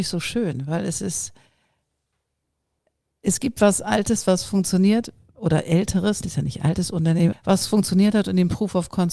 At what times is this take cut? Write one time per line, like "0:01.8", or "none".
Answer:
0:06.2
0:07.3